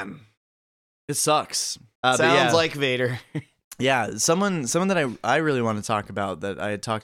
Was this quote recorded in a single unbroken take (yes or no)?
no